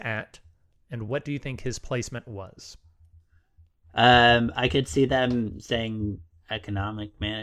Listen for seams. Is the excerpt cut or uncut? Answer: uncut